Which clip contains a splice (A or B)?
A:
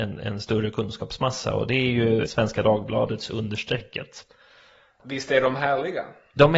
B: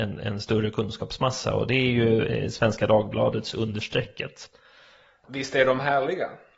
A